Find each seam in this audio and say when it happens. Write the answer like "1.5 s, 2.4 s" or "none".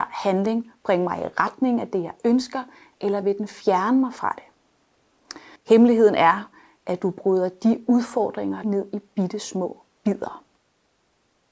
5.6 s, 8.6 s